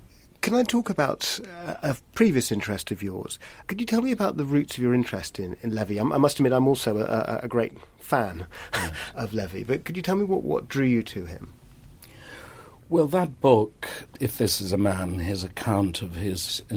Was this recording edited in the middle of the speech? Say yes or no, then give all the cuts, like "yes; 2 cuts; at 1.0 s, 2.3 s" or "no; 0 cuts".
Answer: yes; 1 cut; at 3.6 s